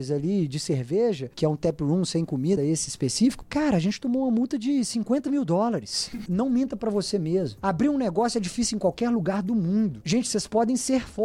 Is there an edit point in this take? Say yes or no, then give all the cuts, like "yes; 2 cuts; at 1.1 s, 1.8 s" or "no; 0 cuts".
yes; 3 cuts; at 2.6 s, 6.3 s, 10.0 s